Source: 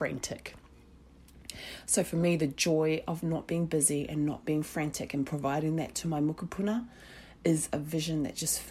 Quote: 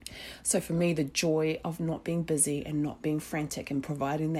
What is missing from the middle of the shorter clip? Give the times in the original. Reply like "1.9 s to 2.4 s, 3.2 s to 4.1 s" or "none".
none